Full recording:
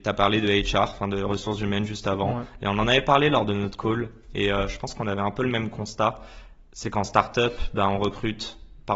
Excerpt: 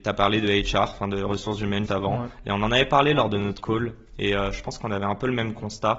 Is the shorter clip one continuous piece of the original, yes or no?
no